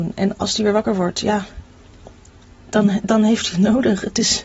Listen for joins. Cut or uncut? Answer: uncut